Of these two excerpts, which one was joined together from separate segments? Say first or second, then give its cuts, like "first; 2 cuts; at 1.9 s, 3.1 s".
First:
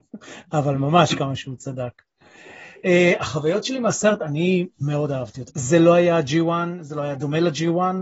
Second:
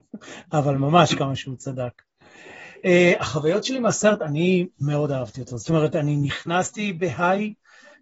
first; 1 cut; at 5.5 s